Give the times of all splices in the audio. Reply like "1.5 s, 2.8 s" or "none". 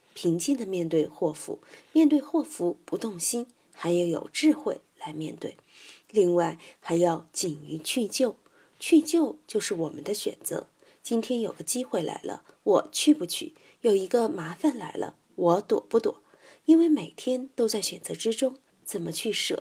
18.7 s